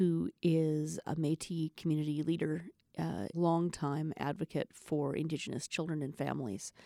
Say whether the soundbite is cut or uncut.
cut